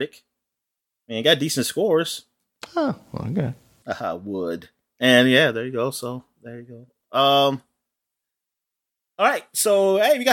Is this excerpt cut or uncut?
cut